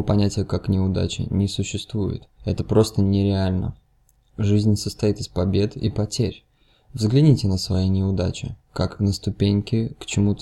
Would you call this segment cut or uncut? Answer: cut